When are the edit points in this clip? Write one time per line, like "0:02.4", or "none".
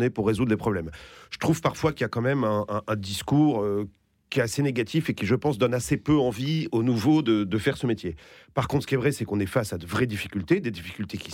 none